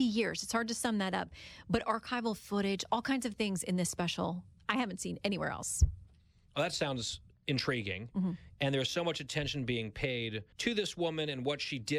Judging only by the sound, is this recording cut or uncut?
cut